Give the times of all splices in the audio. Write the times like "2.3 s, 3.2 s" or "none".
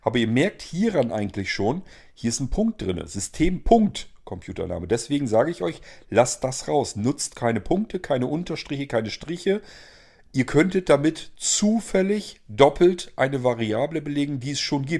none